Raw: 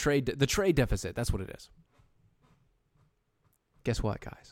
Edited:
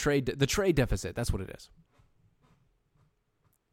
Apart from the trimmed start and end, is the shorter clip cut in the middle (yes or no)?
no